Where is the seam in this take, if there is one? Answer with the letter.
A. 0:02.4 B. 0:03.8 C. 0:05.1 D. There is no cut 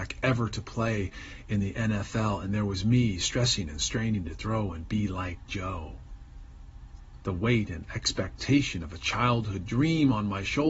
D